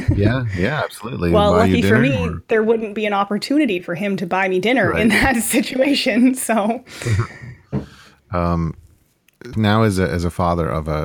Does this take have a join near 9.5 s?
yes; 1 cut; at 9.5 s

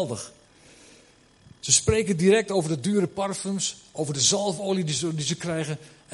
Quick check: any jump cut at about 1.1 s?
no; 0 cuts

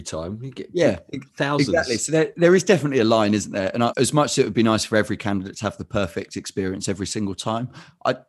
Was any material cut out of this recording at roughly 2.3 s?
no; 1 cut; at 3.9 s

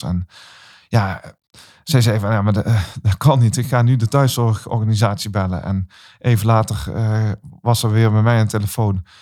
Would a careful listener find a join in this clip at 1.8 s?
no; 0 cuts

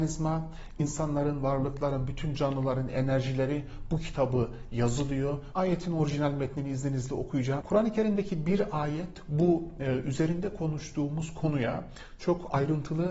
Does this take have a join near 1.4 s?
no; 2 cuts; at 5.5 s, 7.6 s

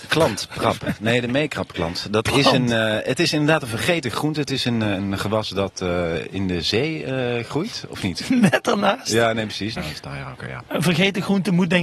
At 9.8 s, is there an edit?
yes; 1 cut; at 9.8 s

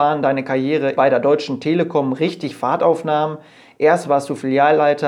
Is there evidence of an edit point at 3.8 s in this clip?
no; 1 cut; at 1.0 s

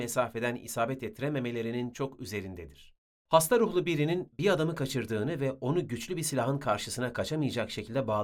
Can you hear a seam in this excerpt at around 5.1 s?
no; 2 cuts; at 1.9 s, 3.1 s

